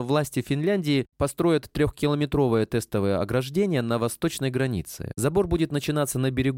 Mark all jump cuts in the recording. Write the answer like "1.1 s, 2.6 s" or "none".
none